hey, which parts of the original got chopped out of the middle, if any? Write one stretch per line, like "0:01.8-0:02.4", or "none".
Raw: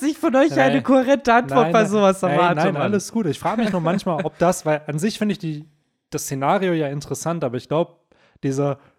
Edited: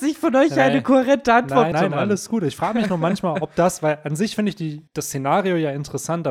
0:01.7-0:02.5
0:05.7-0:06.0